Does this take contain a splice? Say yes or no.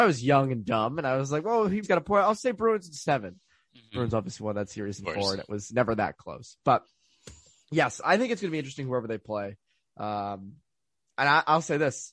yes